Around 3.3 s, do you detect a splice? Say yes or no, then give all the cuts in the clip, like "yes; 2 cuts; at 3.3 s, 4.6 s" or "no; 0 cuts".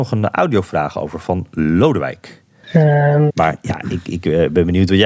yes; 1 cut; at 3.3 s